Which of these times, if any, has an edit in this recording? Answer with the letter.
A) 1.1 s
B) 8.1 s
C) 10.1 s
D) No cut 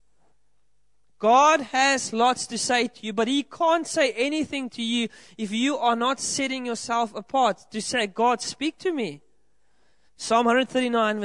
C